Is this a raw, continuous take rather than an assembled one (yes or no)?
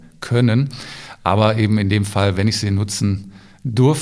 yes